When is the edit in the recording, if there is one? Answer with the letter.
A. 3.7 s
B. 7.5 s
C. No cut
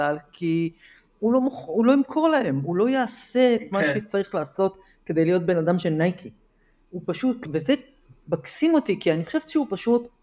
B